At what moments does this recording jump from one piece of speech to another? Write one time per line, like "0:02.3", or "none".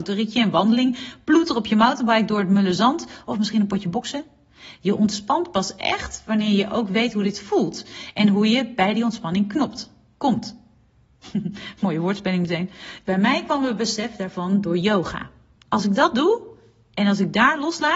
0:13.0
0:15.6

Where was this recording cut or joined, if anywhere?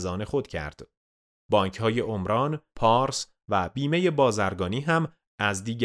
0:02.7

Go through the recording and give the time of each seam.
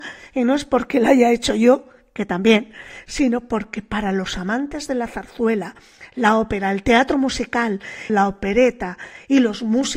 0:08.1

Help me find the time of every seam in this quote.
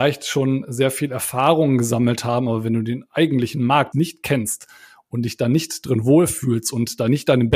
0:03.9

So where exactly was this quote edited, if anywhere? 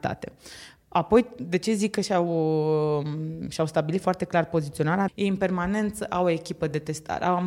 0:05.1

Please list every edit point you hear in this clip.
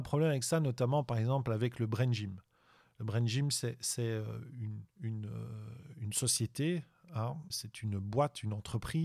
0:04.9
0:07.5

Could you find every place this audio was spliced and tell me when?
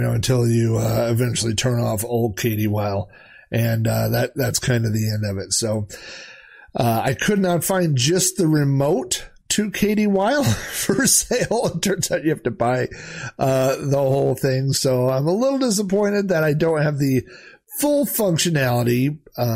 none

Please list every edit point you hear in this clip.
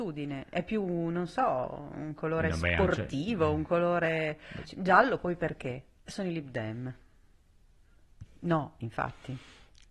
0:04.6
0:06.0
0:08.2

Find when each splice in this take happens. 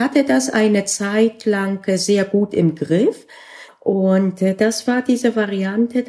0:03.7

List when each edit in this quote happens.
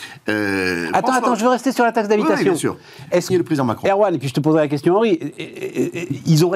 0:03.3

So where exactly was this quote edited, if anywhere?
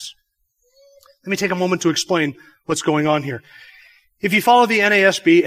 none

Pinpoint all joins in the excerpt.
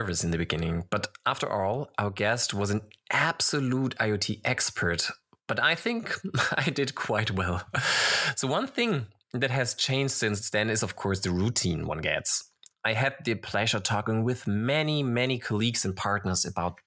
none

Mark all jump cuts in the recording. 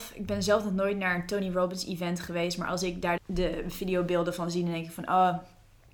0:03.2

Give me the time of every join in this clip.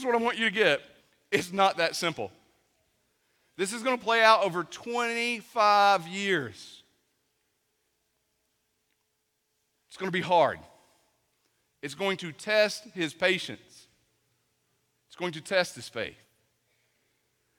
none

